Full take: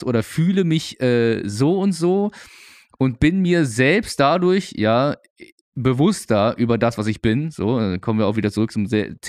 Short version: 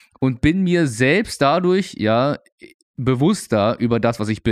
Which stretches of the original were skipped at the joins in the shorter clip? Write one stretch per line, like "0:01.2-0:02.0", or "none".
none